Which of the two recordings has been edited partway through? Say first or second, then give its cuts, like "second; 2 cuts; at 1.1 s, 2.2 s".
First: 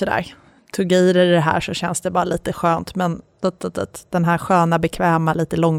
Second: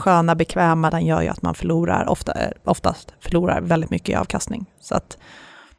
second; 1 cut; at 0.9 s